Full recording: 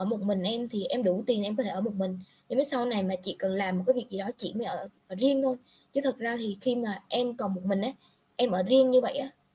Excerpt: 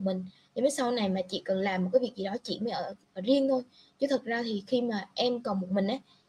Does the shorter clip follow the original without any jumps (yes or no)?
yes